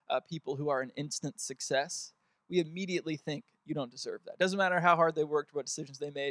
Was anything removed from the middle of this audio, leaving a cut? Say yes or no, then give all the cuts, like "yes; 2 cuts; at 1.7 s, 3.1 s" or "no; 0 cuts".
no; 0 cuts